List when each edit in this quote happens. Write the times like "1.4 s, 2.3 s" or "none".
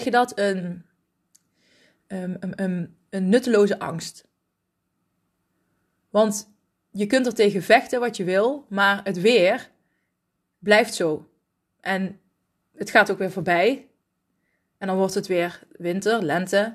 none